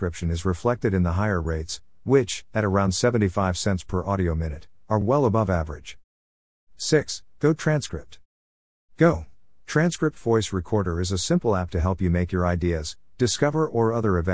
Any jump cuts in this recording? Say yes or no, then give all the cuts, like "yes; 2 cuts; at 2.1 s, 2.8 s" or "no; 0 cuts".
no; 0 cuts